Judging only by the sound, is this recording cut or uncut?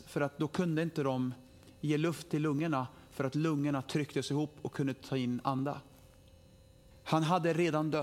cut